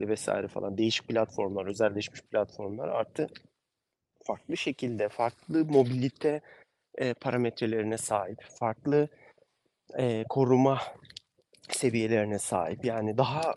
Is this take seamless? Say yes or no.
yes